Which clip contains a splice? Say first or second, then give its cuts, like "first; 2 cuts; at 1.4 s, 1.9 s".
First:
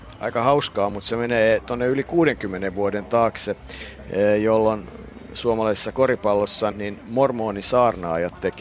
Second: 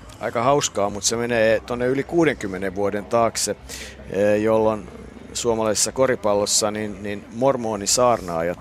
first; 1 cut; at 6.7 s